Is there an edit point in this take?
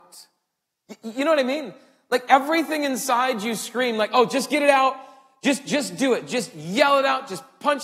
no; 0 cuts

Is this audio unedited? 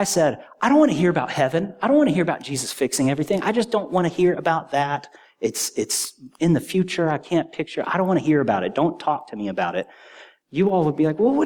yes; 0 cuts

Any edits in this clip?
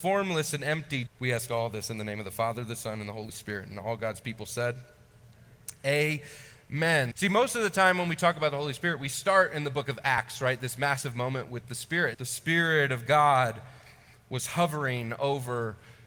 yes; 3 cuts; at 1.1 s, 7.1 s, 12.1 s

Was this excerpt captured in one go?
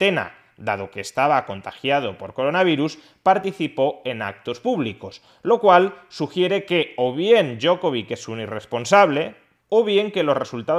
no; 1 cut; at 9.6 s

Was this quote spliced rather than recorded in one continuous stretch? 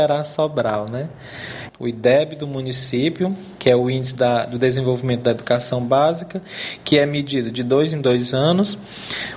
yes; 1 cut; at 1.7 s

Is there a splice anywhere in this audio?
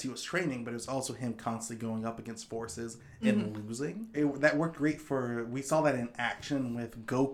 yes; 1 cut; at 4.1 s

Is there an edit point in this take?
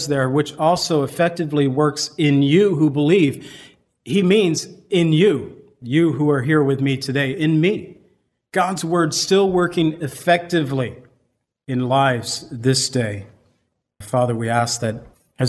yes; 1 cut; at 14.0 s

